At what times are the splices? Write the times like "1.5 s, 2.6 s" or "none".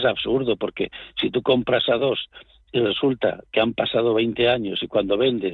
none